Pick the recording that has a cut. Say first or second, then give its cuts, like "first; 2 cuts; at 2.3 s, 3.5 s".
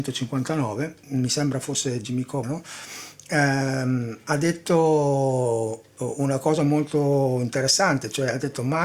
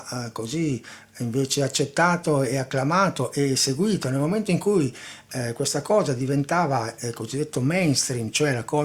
first; 1 cut; at 2.4 s